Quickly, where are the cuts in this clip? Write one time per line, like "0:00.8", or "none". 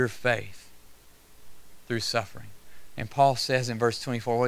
none